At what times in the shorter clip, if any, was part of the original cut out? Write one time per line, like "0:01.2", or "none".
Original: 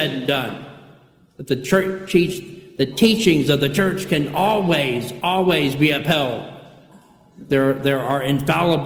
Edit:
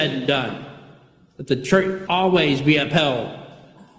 0:02.1